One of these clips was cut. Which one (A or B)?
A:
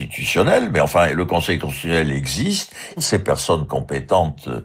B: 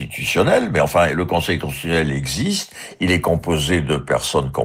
A